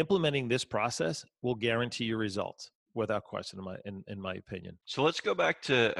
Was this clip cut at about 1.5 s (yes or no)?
no